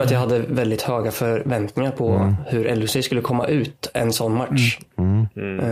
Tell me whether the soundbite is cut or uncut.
uncut